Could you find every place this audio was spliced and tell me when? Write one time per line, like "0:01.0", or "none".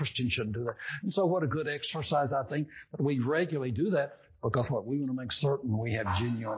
none